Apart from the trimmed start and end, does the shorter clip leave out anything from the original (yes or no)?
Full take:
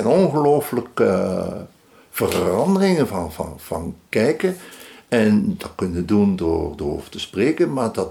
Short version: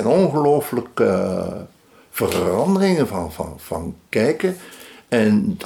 no